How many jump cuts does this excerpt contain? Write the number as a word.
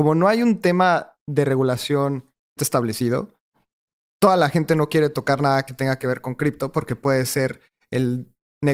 one